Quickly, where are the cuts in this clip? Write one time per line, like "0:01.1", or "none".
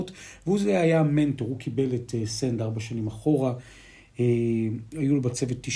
none